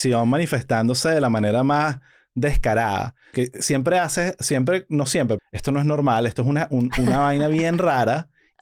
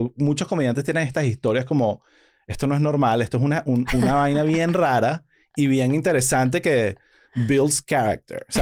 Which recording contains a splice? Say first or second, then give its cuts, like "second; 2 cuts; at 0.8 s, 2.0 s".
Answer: first; 2 cuts; at 3.3 s, 5.4 s